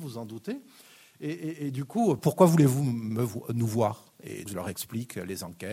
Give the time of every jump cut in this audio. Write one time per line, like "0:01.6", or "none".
0:02.2
0:04.5